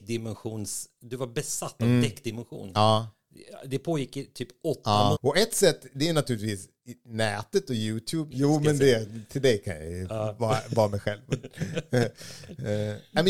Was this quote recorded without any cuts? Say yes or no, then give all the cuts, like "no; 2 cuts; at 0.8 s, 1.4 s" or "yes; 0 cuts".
no; 2 cuts; at 5.2 s, 8.3 s